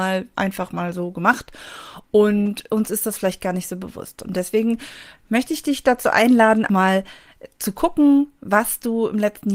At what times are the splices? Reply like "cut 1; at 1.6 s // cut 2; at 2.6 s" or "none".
cut 1; at 6.7 s